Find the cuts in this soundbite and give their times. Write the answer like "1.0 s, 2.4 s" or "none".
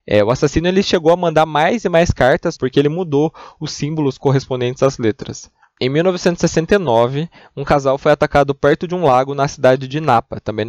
2.5 s